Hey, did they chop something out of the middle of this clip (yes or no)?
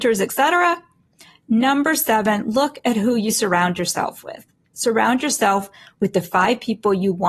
no